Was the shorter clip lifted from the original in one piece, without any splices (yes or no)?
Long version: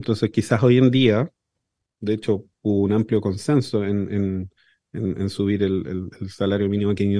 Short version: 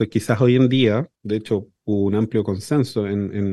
no